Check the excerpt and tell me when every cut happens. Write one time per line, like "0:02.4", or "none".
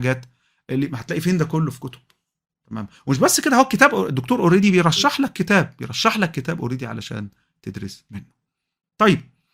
none